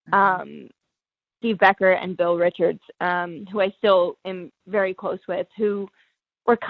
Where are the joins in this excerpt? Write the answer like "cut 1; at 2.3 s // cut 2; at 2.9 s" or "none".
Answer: cut 1; at 1.4 s